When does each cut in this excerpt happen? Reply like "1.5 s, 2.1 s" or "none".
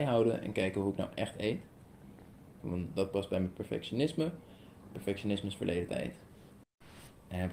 2.6 s

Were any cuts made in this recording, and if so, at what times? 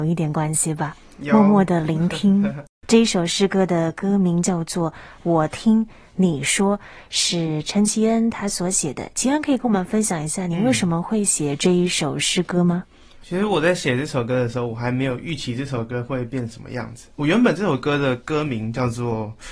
none

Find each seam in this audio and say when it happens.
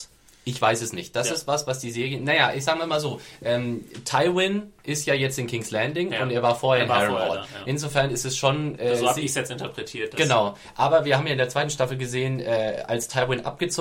none

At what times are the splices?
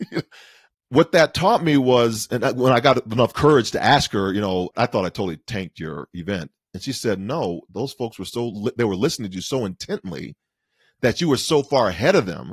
none

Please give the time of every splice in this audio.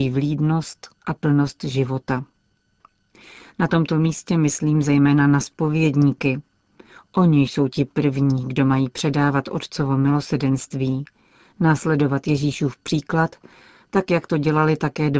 none

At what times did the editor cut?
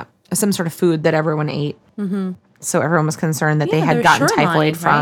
2.5 s

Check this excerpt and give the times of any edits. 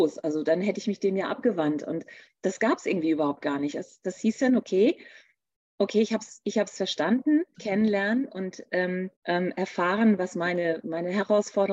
7.5 s, 9.2 s

